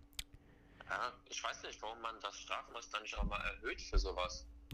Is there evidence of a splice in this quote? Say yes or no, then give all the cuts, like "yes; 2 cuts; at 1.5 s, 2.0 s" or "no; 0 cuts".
yes; 1 cut; at 3.2 s